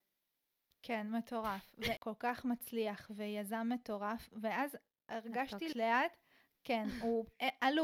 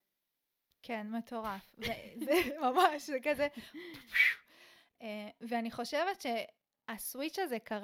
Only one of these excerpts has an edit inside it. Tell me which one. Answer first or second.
first